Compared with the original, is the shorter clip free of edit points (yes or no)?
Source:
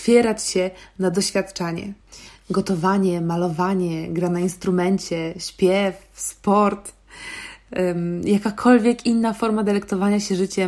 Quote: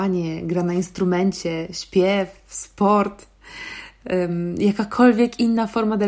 yes